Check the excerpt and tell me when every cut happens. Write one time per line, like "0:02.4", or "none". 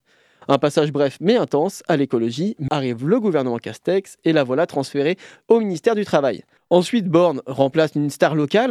0:02.7
0:06.6